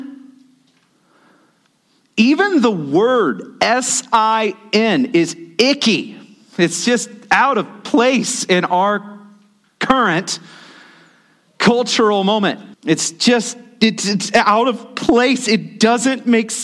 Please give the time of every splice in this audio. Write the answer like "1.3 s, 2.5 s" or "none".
12.7 s